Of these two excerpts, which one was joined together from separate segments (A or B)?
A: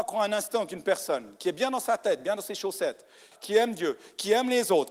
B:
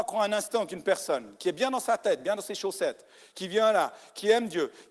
A